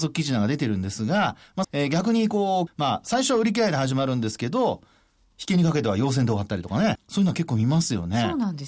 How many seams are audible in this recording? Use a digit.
3